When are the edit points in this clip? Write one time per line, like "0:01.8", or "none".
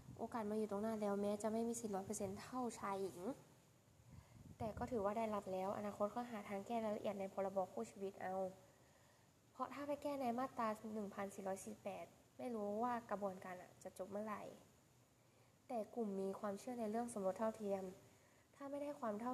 none